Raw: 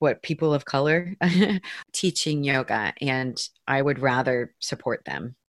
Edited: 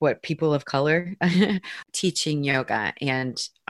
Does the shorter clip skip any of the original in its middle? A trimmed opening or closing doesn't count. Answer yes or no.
no